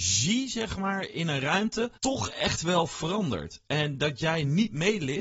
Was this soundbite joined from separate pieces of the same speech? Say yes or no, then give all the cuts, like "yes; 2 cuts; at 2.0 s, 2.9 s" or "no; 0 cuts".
yes; 1 cut; at 2.0 s